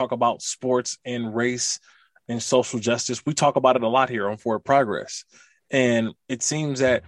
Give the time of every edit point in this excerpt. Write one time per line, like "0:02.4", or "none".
none